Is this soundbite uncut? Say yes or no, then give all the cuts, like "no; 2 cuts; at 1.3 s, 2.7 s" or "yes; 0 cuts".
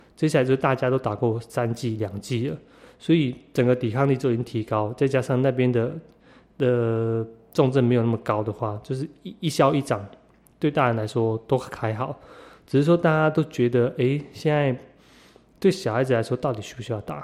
yes; 0 cuts